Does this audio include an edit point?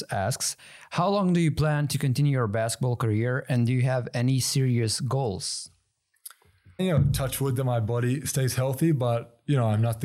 yes; 1 cut; at 6.8 s

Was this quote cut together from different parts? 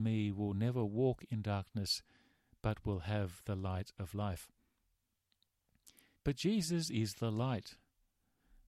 yes; 1 cut; at 6.2 s

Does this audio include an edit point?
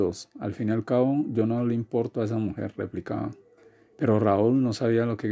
no; 0 cuts

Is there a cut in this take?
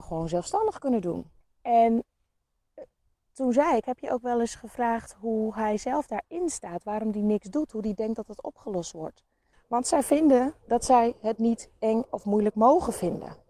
yes; 2 cuts; at 1.4 s, 9.5 s

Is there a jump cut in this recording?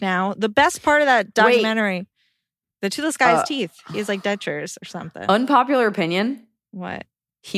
no; 0 cuts

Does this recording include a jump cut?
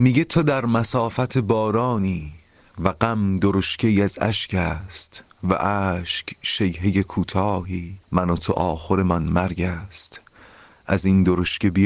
yes; 1 cut; at 8.0 s

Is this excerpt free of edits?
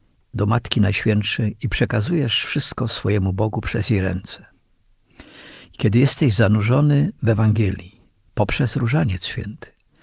yes; 0 cuts

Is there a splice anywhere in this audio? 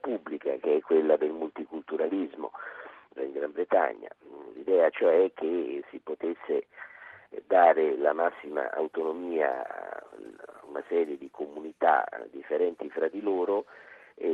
yes; 1 cut; at 3.2 s

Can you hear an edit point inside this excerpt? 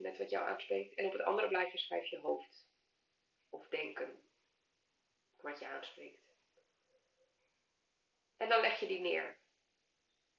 no; 0 cuts

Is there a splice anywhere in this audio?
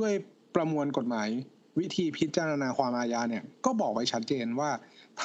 no; 0 cuts

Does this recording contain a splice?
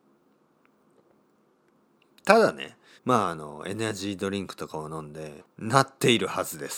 yes; 2 cuts; at 3.0 s, 5.4 s

